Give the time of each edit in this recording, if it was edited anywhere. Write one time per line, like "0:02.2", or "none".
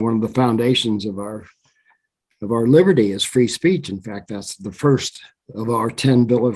none

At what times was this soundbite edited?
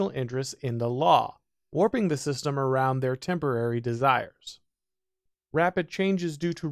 0:05.3

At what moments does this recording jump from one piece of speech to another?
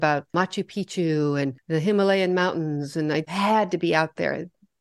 0:03.2

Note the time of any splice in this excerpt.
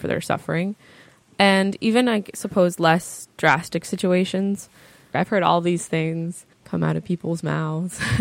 0:05.1
0:06.5

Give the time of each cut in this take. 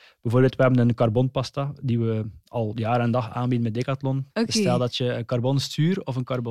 0:04.3

